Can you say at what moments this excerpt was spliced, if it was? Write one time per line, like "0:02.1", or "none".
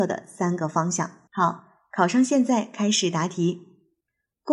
0:01.3